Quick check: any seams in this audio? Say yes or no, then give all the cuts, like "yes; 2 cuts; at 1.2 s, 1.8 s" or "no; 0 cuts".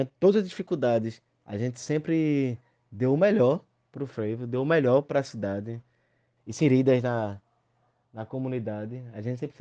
yes; 1 cut; at 6.4 s